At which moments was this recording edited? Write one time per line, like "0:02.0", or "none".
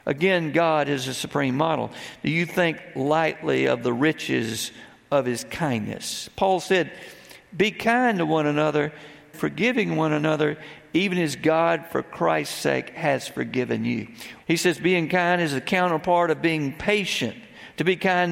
0:09.3
0:14.4